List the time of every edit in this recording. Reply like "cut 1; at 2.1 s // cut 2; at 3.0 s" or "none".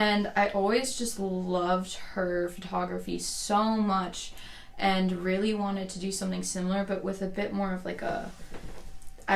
none